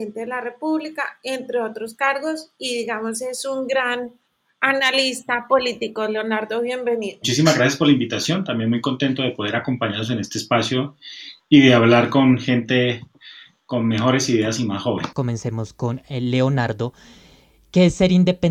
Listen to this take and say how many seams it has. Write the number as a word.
one